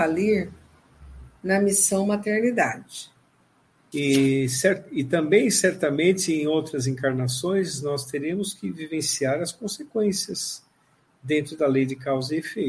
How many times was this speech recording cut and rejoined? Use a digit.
1